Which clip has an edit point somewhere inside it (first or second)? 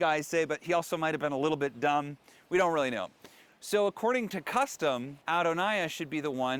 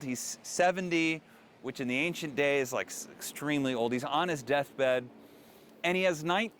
first